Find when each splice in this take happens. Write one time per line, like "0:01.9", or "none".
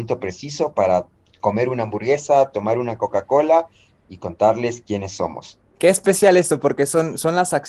none